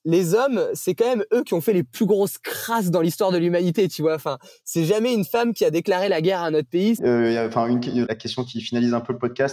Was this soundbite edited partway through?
yes; 2 cuts; at 7.0 s, 8.1 s

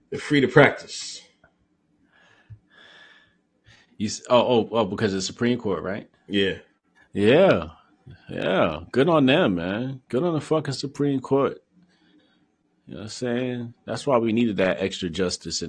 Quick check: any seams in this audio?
no; 0 cuts

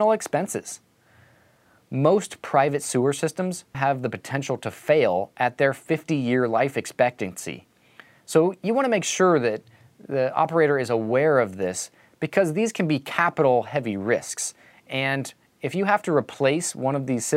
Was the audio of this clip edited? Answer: yes; 1 cut; at 3.7 s

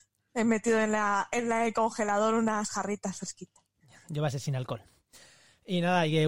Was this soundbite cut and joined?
no; 0 cuts

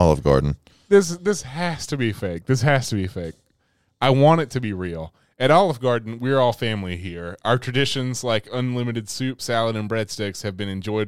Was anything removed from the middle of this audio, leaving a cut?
no; 0 cuts

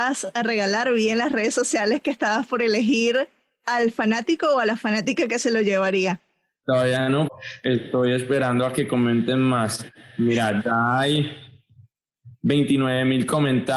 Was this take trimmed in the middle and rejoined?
yes; 1 cut; at 7.3 s

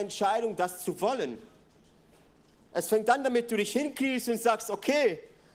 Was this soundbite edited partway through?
no; 0 cuts

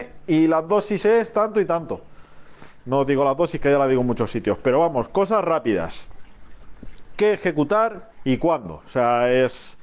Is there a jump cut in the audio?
yes; 2 cuts; at 2.8 s, 8.1 s

